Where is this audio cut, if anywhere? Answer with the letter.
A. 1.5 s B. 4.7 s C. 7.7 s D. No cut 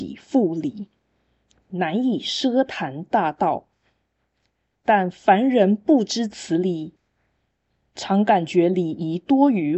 B